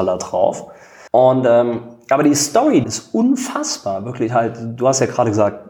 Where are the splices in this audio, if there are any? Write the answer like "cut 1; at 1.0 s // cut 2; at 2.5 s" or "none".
cut 1; at 1.1 s // cut 2; at 2.8 s